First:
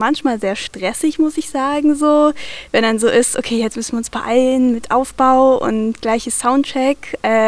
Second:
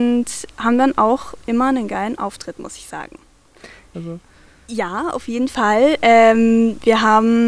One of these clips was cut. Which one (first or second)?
second